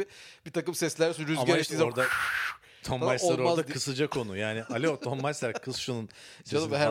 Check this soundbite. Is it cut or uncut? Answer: uncut